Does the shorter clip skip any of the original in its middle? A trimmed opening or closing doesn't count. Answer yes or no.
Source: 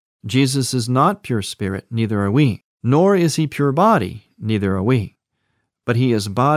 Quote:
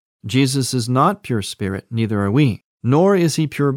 no